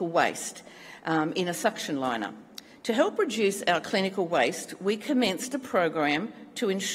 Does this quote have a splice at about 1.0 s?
no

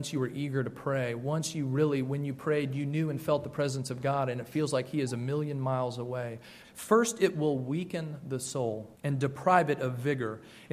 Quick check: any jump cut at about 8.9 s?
yes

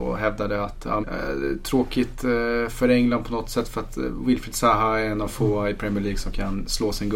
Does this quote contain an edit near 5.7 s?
no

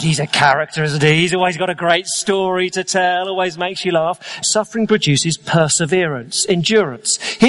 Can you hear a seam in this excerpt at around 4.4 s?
yes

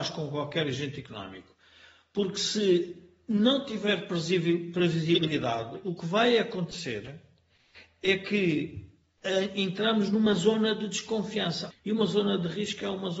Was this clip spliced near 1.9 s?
no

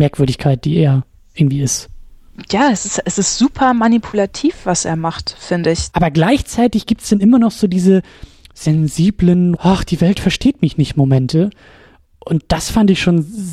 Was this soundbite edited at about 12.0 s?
no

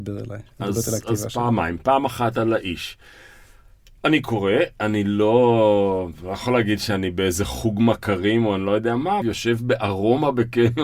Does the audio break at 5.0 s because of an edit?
no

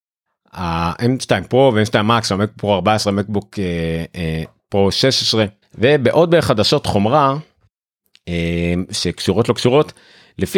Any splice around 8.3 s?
no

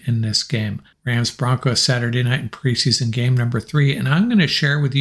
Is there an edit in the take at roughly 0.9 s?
yes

